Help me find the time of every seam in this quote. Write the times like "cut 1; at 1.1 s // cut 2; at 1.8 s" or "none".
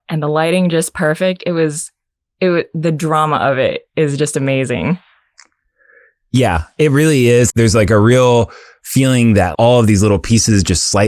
cut 1; at 7.5 s // cut 2; at 9.5 s